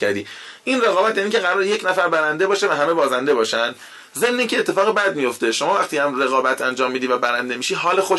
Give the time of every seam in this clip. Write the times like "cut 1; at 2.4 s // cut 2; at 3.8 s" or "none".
none